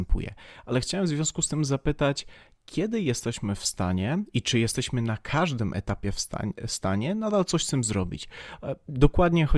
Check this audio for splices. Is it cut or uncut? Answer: uncut